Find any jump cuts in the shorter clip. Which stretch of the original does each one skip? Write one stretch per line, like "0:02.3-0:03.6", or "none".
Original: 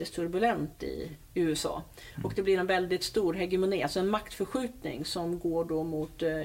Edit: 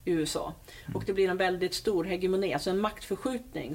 none